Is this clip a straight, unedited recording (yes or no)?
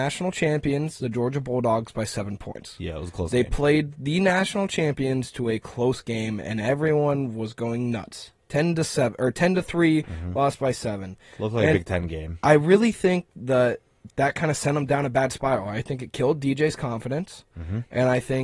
yes